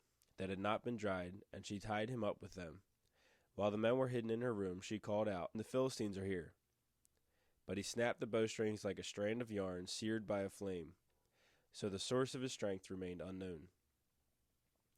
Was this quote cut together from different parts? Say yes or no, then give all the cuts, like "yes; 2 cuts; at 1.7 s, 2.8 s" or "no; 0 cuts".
yes; 1 cut; at 5.5 s